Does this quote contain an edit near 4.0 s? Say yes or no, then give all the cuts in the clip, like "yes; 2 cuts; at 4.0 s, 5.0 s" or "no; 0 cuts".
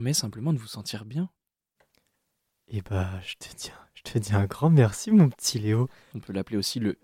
no; 1 cut; at 6.1 s